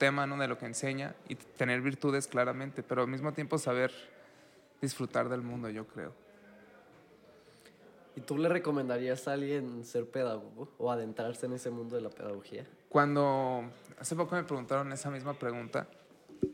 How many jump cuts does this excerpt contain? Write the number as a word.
zero